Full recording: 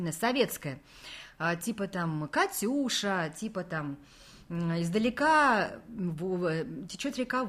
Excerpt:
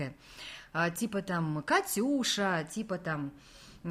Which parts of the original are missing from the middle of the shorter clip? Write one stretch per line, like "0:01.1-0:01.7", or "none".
none